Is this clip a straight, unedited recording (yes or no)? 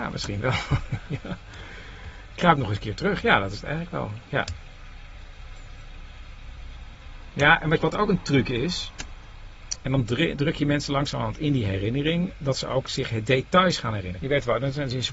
no